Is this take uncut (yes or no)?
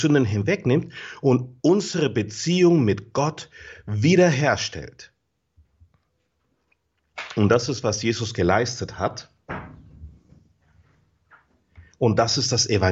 no